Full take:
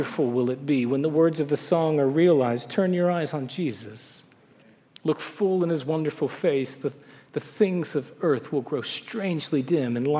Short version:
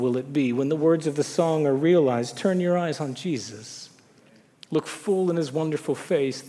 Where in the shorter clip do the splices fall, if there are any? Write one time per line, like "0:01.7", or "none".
none